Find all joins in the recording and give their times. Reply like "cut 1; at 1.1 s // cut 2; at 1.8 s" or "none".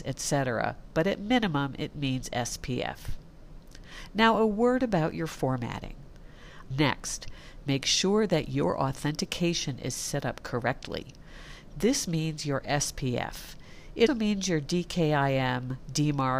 cut 1; at 6.7 s // cut 2; at 14.1 s